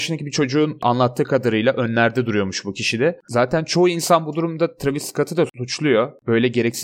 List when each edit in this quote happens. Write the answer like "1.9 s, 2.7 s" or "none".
3.2 s